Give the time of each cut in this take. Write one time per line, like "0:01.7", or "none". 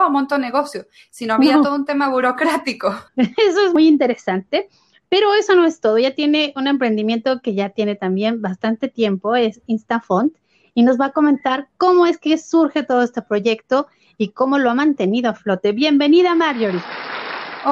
0:03.1